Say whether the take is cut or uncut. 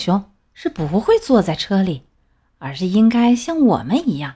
uncut